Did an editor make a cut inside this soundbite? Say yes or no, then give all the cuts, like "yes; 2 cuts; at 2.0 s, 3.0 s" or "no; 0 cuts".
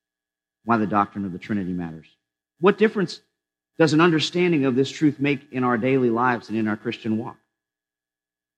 yes; 1 cut; at 2.4 s